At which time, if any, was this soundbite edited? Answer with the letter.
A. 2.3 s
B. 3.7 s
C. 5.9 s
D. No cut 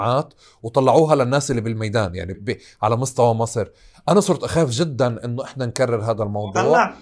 A